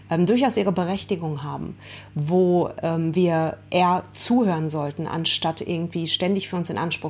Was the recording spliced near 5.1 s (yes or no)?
no